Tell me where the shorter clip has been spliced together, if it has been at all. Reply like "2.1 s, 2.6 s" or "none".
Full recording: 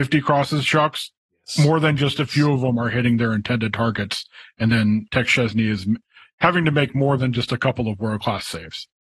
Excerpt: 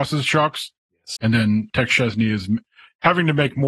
1.2 s

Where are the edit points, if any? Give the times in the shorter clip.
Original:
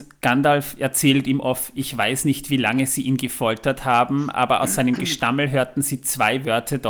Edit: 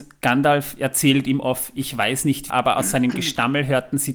2.5 s

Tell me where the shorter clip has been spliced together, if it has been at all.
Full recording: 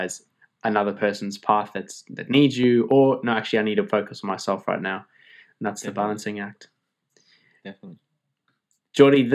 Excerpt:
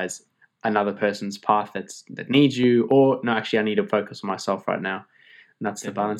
none

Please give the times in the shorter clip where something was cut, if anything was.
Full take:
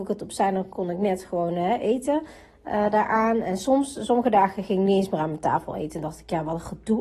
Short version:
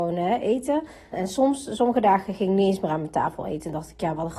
1.1 s

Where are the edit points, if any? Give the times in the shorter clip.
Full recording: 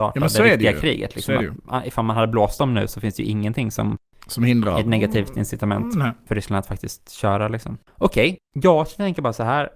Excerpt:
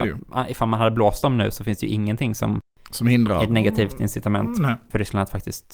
none

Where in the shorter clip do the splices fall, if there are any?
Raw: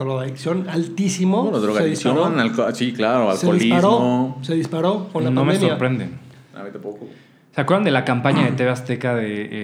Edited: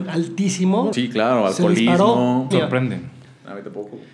0.9 s, 2.5 s

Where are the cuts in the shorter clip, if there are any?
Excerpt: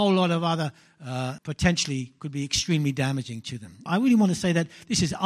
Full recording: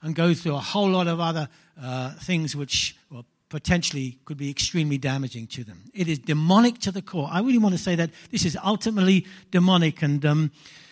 1.4 s, 3.9 s

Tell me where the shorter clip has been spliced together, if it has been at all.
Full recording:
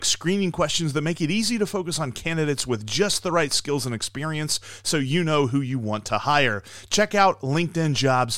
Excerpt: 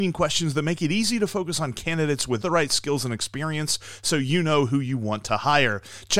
2.4 s

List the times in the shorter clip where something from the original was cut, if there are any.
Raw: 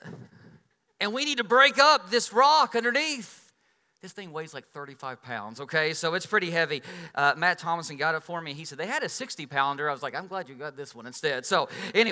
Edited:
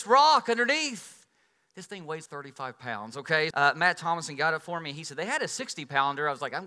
2.3 s, 3.5 s

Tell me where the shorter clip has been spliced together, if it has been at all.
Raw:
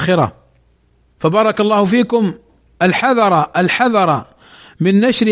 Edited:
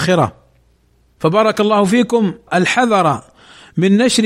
2.5 s

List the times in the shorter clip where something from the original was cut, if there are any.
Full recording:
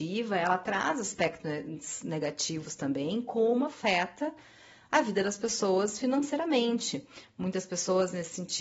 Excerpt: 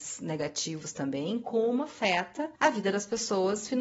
2.6 s

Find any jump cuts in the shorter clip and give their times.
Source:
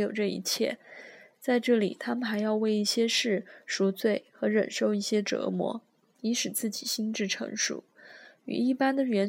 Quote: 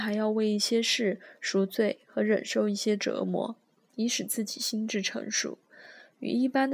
none

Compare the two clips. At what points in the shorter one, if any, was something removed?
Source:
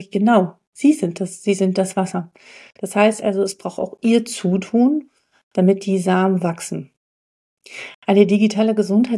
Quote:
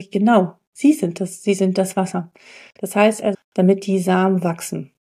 3.3 s

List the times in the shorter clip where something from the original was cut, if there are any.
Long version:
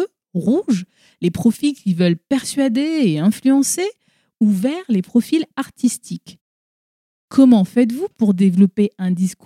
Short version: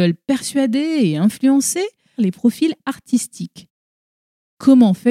2.2 s

